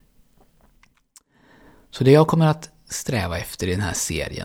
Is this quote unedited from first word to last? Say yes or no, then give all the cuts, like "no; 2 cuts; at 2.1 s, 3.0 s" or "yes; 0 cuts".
yes; 0 cuts